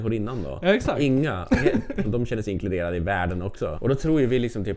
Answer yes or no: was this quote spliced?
yes